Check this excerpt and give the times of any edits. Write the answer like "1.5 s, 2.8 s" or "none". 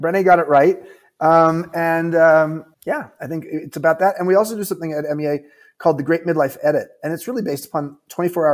2.7 s